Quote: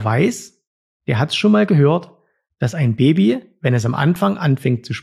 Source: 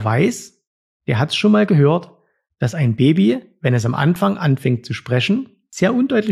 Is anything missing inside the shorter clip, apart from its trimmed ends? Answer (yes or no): no